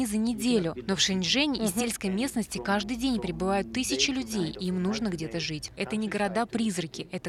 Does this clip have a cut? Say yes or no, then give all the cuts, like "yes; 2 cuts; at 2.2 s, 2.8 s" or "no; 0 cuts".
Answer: yes; 1 cut; at 5.8 s